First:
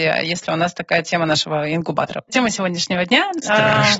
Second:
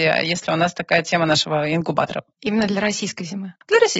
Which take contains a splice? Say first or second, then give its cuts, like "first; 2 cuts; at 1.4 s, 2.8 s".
first; 1 cut; at 2.3 s